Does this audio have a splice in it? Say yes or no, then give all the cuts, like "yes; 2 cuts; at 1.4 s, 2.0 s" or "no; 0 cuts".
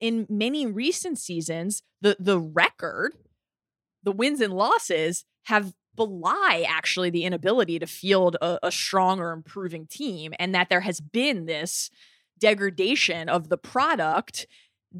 yes; 1 cut; at 5.9 s